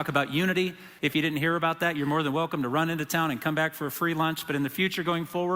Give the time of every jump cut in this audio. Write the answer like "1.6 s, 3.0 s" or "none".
1.0 s